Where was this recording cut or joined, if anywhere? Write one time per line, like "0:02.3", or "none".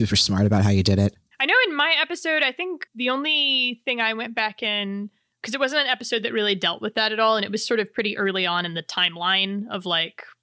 0:02.9

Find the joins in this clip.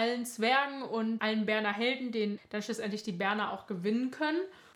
0:02.4

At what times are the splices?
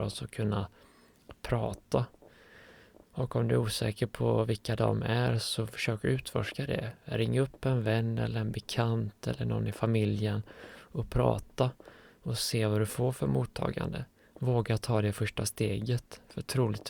0:03.0

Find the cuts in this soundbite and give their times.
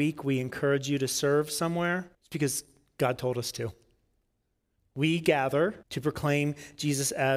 0:02.1
0:04.8
0:05.8

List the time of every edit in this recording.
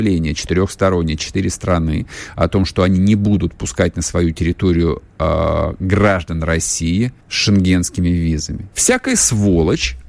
0:07.2
0:08.7

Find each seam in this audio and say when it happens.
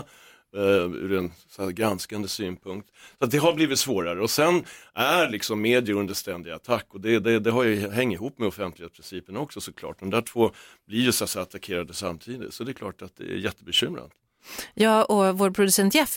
none

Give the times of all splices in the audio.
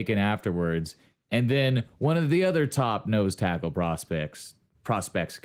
none

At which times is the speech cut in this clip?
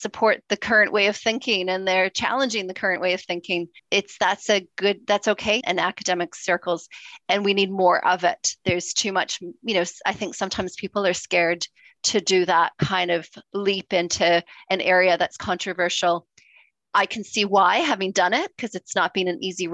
0:03.8
0:05.6
0:13.4

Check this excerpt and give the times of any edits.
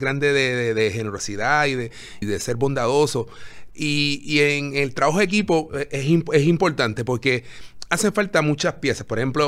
0:02.2

